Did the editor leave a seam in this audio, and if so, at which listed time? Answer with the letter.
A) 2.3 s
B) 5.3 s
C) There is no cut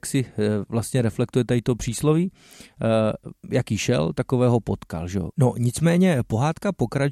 B